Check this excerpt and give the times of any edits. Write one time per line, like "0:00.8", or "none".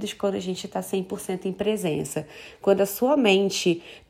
none